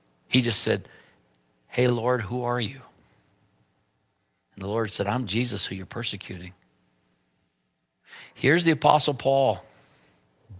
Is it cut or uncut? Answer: uncut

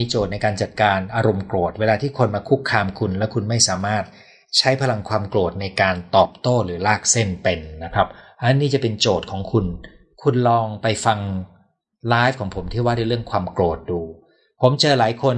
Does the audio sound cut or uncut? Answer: uncut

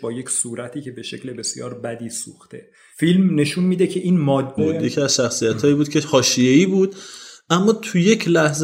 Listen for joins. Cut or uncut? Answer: cut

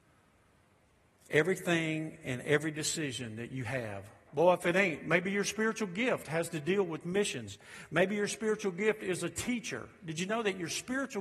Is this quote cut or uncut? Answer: cut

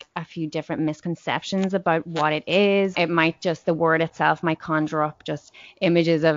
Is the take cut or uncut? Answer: cut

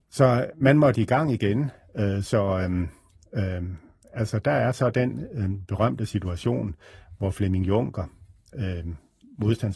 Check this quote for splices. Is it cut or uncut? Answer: uncut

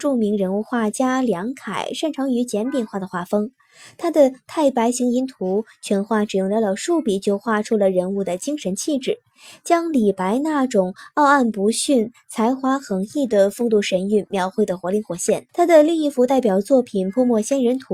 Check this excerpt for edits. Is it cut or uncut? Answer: cut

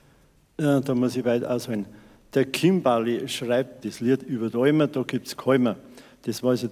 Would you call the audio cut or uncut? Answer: cut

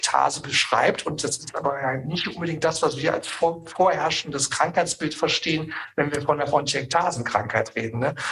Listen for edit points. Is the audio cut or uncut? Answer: uncut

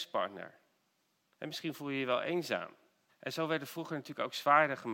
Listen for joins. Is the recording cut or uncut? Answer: cut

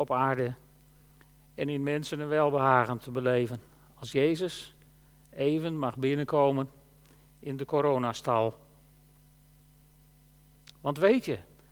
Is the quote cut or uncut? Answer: uncut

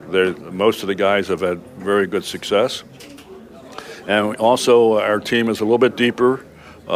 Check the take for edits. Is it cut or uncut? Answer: uncut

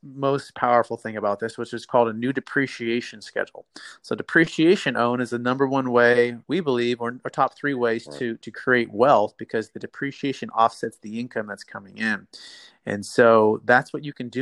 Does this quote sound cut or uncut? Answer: cut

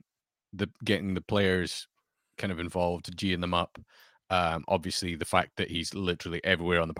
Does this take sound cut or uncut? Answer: uncut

